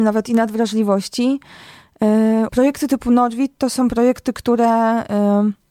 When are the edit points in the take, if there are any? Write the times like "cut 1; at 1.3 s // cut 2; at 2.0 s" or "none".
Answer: cut 1; at 2.5 s